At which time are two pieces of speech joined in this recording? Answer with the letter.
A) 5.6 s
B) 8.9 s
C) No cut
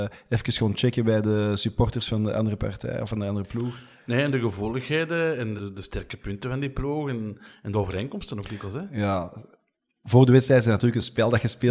A